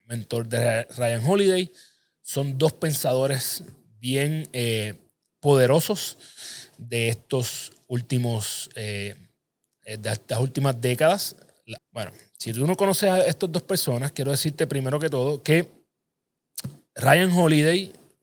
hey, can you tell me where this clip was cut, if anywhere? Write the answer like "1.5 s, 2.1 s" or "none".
11.8 s